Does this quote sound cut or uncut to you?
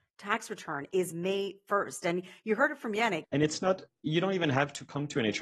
cut